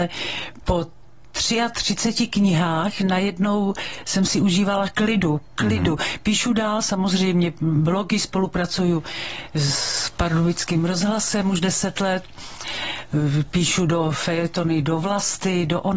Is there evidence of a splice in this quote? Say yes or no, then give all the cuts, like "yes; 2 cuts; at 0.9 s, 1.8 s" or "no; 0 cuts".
no; 0 cuts